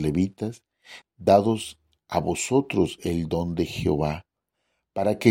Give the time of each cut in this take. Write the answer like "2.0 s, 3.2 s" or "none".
1.0 s